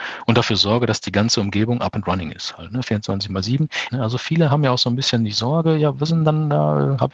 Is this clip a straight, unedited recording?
no; 1 cut; at 3.9 s

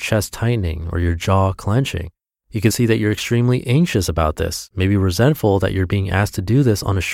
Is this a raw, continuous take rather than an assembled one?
no; 1 cut; at 2.7 s

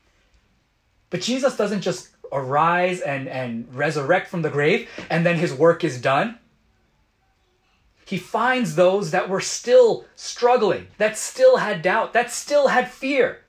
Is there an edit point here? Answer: yes; 1 cut; at 10.9 s

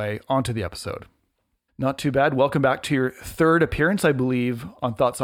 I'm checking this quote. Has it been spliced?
yes; 1 cut; at 1.7 s

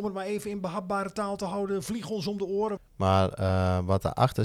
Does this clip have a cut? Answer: yes; 1 cut; at 2.8 s

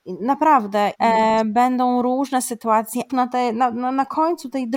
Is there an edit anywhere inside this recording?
yes; 2 cuts; at 0.9 s, 3.1 s

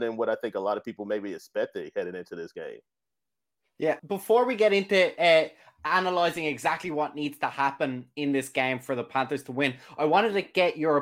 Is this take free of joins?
no; 1 cut; at 4.0 s

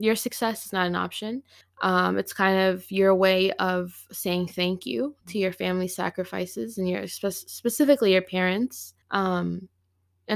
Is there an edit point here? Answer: yes; 2 cuts; at 1.6 s, 9.0 s

